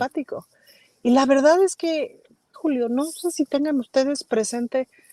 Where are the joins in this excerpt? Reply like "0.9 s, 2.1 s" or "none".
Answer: 2.5 s

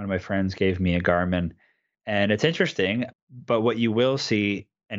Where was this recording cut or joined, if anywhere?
3.1 s

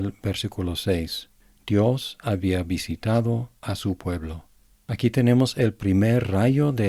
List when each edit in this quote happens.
none

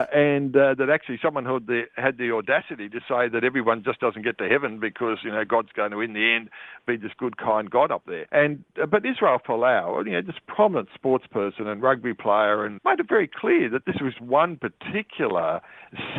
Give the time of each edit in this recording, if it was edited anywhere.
8.3 s, 12.8 s, 14.1 s

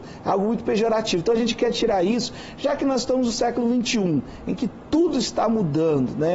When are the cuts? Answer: none

